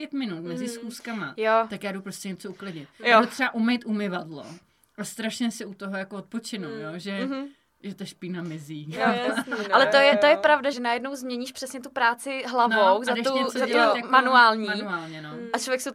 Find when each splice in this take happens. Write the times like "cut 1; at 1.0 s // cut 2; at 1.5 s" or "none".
cut 1; at 10.7 s